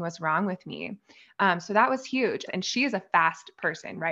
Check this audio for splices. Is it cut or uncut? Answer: cut